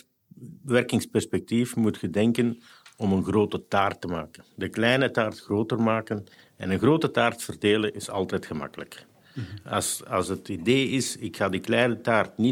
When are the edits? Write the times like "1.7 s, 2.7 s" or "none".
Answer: none